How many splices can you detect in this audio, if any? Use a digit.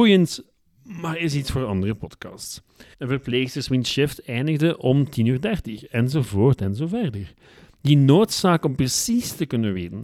1